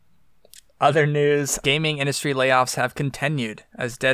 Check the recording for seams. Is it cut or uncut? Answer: cut